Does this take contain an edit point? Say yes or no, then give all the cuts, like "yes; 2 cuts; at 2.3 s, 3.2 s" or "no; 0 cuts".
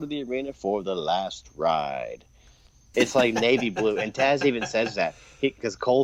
yes; 1 cut; at 2.9 s